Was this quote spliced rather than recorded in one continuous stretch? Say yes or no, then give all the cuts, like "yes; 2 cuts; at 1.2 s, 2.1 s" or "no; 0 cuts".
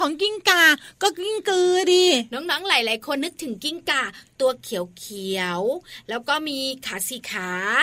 yes; 1 cut; at 3.2 s